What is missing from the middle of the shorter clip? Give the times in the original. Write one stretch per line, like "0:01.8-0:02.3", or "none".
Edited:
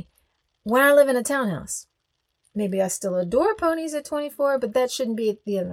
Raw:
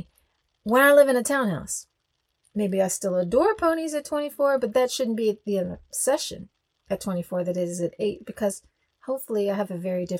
none